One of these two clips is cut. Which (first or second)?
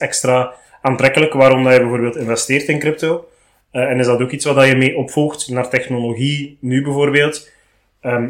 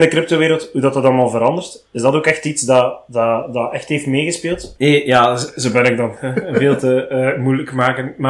second